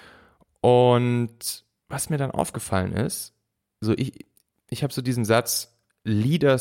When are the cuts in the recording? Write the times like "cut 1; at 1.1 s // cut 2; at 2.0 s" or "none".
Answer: none